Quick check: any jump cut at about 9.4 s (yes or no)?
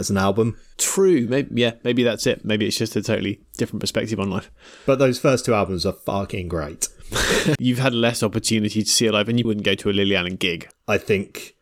yes